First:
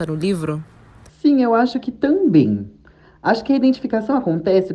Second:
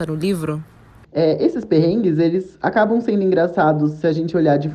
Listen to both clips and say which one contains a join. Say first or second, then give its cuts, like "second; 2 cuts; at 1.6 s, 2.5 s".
second; 1 cut; at 1.0 s